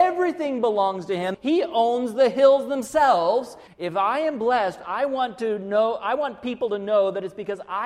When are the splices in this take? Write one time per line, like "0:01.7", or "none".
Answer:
0:01.3
0:03.7